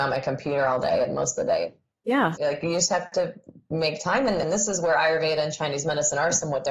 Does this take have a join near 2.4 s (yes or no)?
yes